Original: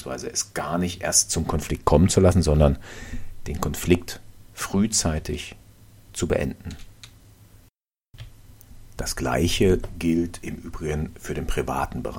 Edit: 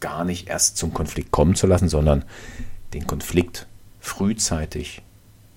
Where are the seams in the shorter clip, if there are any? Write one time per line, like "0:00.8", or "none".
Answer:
none